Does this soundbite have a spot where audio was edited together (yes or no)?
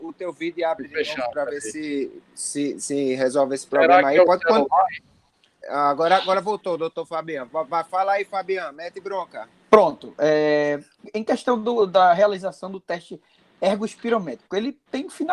yes